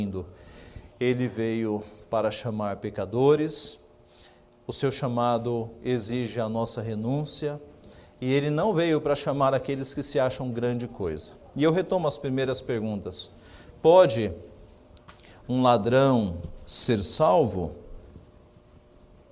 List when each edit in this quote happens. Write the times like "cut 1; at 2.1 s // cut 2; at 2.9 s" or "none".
none